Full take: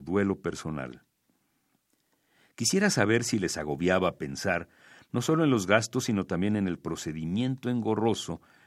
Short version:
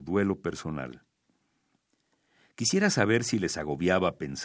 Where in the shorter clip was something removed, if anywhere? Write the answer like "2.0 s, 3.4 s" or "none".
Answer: none